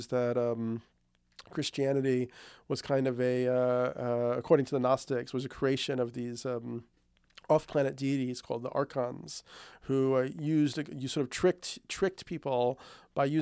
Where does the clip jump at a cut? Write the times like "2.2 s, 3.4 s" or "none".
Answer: none